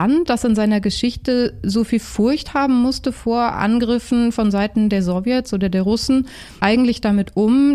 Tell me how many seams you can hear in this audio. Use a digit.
0